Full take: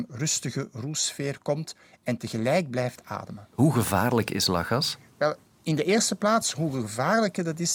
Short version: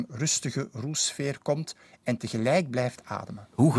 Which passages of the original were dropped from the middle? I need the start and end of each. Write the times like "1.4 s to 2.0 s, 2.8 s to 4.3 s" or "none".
none

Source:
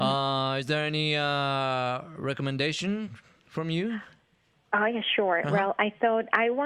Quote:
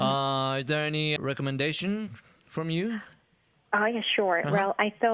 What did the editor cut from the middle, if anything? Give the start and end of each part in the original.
1.2 s to 2.2 s

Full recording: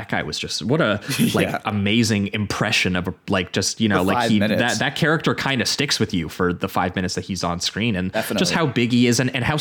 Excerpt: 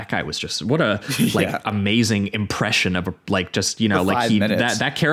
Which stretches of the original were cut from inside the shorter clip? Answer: none

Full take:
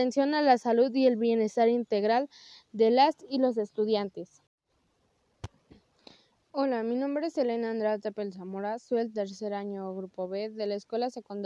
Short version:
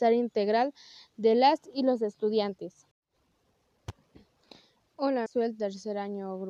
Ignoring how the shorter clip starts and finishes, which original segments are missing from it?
6.8 s to 8.8 s

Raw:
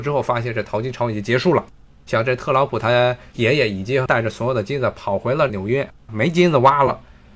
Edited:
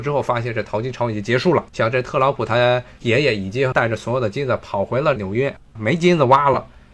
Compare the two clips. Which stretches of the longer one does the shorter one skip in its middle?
1.7 s to 2.0 s

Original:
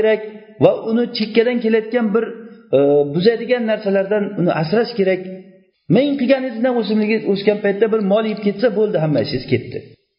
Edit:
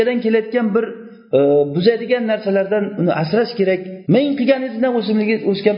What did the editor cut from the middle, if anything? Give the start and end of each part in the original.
5.5 s to 5.9 s

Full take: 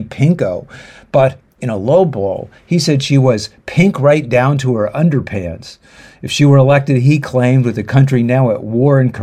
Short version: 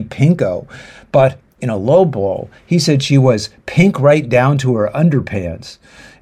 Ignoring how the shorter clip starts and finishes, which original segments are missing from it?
none

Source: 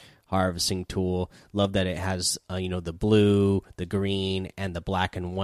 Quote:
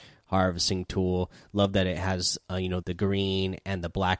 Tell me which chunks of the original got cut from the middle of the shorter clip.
2.8 s to 3.7 s

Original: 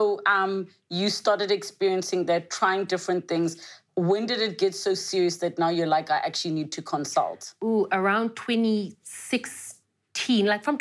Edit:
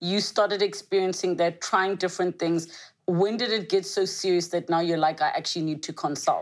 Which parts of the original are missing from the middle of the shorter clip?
none

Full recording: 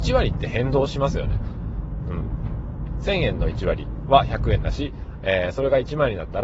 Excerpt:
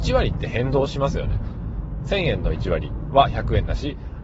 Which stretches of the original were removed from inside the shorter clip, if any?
2.0 s to 3.0 s

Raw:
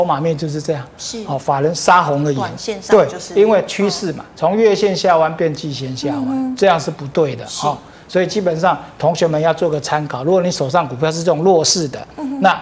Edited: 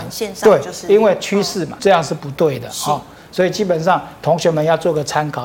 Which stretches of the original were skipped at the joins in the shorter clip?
4.3 s to 6.6 s

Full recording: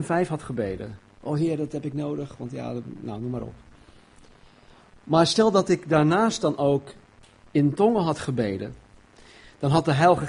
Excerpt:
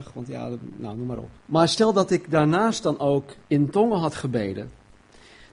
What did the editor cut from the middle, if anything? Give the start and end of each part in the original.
3.6 s to 5.0 s, 7.0 s to 7.5 s

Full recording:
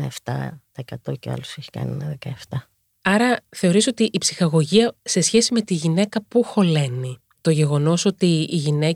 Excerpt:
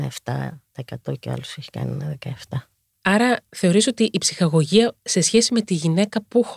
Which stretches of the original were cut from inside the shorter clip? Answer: none

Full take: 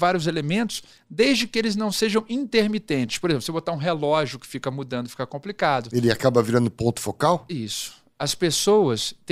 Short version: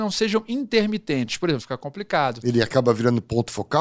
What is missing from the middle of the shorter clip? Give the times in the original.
3.4 s to 5.1 s

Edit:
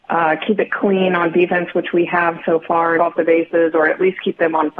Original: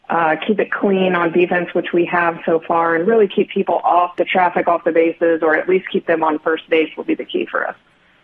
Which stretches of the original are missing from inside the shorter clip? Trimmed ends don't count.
3.0 s to 4.6 s

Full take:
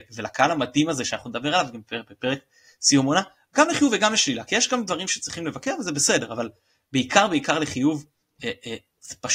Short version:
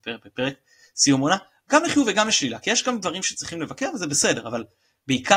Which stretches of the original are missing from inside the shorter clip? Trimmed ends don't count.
none

